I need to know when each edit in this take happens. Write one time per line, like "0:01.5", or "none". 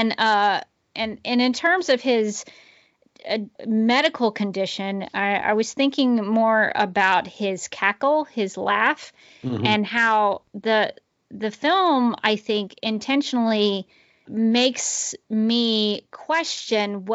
0:03.6
0:14.3